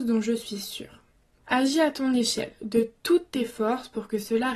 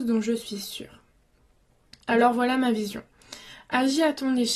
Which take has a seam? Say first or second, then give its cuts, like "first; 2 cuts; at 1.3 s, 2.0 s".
first; 1 cut; at 1.4 s